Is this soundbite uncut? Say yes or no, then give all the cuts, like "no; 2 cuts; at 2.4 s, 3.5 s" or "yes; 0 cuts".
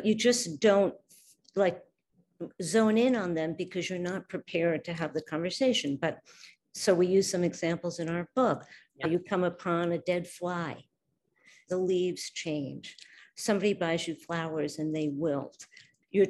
no; 1 cut; at 11.7 s